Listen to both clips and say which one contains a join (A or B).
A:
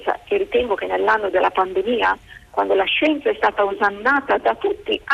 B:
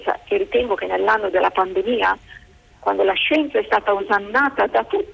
A